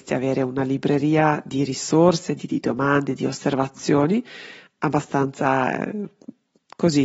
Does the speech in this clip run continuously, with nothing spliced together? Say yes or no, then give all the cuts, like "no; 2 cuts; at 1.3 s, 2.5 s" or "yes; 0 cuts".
no; 1 cut; at 2.4 s